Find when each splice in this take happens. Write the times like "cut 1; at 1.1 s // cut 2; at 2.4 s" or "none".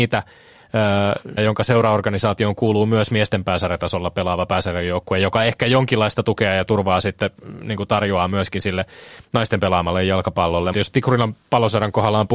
cut 1; at 1.4 s // cut 2; at 10.7 s